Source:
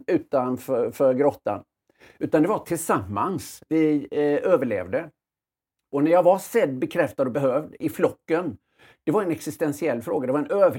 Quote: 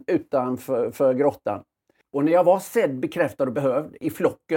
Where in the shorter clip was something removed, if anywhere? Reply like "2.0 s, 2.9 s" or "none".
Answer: 2.0 s